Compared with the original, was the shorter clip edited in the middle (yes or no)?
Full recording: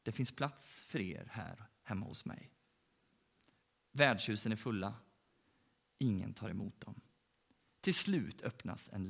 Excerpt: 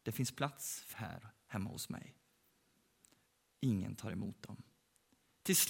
yes